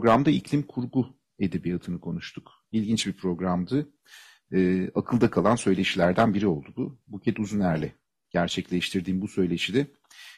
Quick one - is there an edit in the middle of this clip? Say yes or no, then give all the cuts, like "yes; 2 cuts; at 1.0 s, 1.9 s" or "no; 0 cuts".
no; 0 cuts